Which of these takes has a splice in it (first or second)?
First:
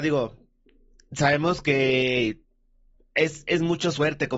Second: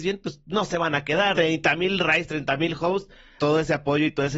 second